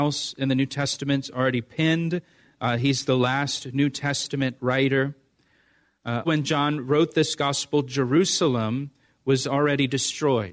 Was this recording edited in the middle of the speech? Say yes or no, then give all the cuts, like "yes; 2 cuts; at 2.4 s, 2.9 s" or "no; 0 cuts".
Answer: yes; 1 cut; at 6.2 s